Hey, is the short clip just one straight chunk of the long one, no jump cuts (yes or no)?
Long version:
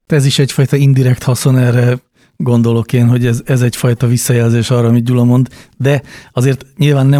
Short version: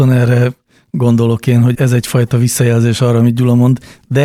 no